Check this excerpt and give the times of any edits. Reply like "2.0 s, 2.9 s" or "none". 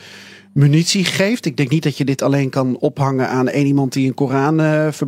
none